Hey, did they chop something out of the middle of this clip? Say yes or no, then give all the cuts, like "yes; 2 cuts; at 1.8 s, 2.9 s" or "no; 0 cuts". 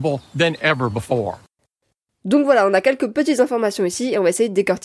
no; 0 cuts